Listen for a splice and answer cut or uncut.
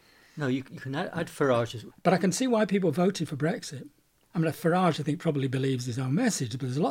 cut